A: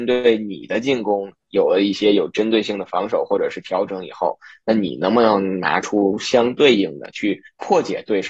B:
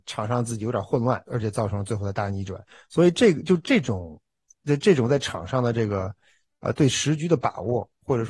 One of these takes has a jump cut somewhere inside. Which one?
B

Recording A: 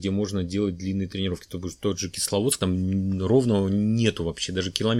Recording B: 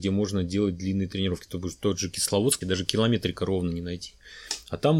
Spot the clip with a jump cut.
B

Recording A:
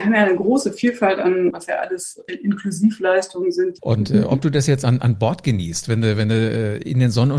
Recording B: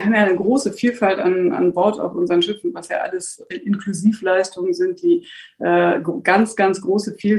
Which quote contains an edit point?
A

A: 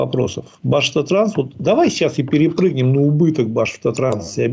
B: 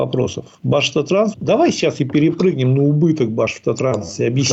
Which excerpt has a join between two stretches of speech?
B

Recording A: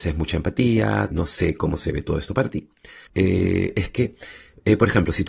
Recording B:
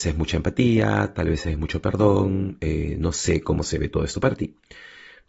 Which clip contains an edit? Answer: A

